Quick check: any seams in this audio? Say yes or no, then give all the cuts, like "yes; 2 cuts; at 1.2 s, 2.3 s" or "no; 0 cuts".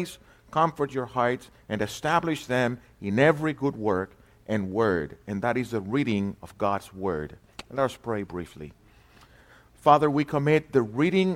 no; 0 cuts